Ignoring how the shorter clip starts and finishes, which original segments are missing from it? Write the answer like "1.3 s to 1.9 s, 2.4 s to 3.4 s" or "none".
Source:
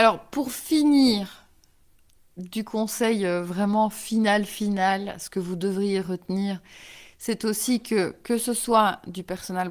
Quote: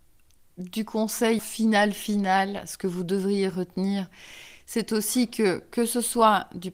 3.2 s to 3.9 s